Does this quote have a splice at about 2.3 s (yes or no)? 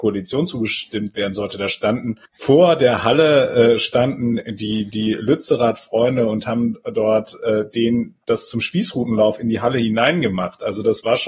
yes